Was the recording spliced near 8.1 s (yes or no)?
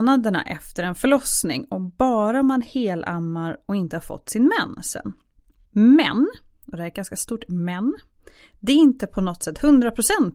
no